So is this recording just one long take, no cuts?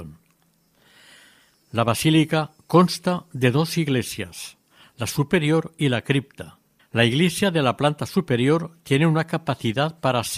no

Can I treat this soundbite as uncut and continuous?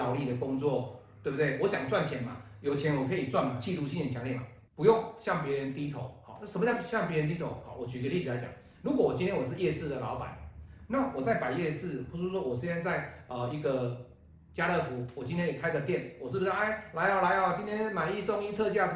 no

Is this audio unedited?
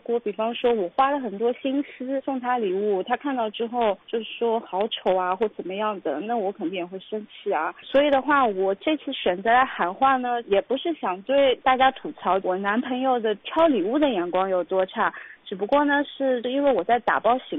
yes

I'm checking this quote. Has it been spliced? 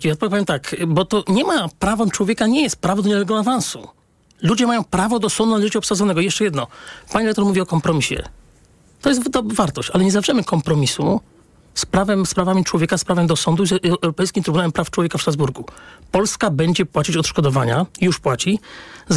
no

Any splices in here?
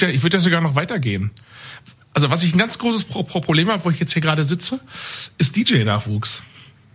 no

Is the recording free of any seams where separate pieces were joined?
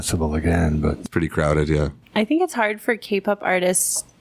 yes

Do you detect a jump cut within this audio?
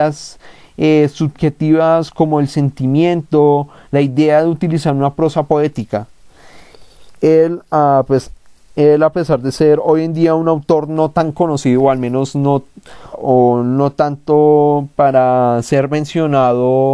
yes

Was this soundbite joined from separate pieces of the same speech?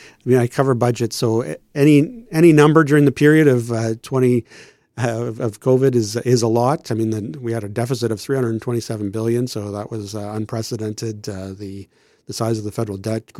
no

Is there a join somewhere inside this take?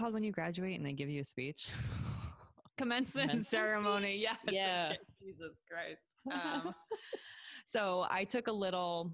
no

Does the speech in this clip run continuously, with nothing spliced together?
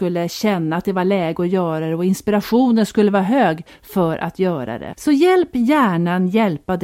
no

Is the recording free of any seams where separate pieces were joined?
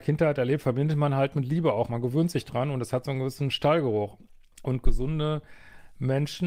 yes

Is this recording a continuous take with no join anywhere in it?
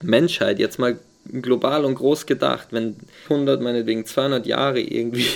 no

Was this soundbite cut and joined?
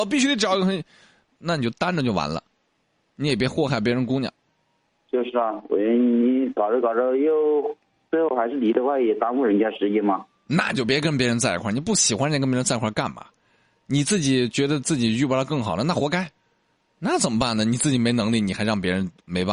no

